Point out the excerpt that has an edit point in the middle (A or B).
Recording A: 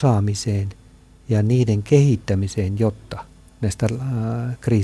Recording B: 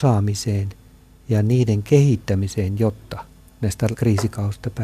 B